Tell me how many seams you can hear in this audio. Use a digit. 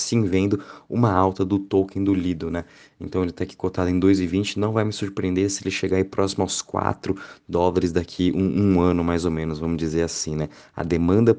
0